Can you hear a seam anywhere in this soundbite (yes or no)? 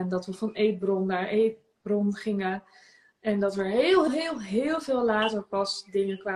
yes